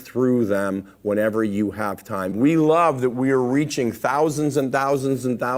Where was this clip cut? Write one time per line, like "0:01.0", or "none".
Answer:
0:02.3

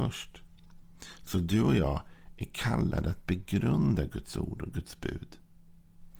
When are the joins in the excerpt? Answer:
none

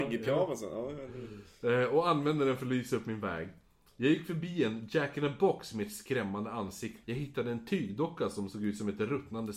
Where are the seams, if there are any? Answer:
0:07.0

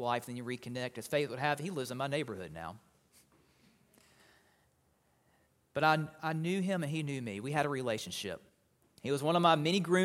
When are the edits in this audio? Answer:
0:08.8

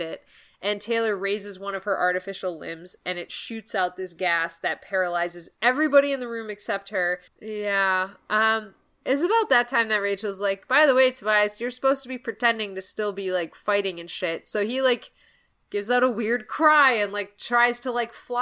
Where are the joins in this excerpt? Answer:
0:07.3

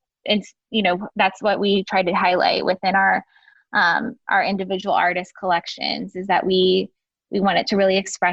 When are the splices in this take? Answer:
none

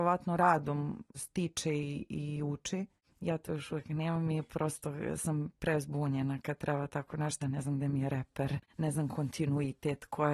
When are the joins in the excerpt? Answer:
0:07.4

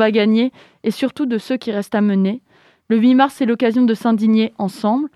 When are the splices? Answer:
none

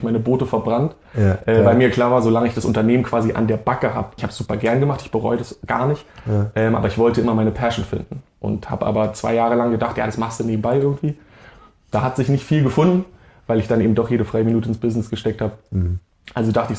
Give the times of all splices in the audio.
0:04.2

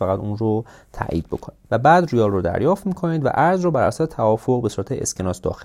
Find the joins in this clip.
0:01.6

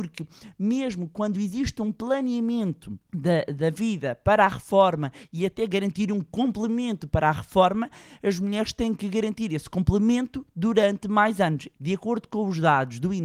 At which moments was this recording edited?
0:03.0
0:11.8

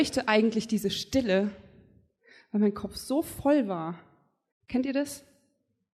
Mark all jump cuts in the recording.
0:04.5

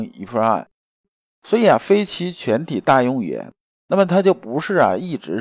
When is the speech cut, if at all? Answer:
none

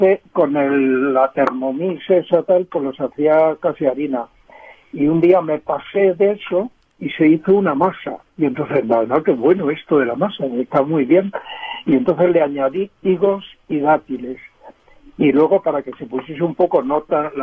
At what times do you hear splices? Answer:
none

